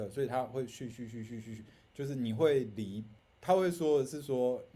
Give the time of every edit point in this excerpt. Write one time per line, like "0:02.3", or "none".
0:00.9